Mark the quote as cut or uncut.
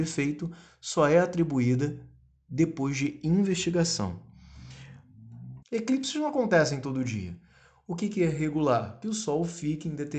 cut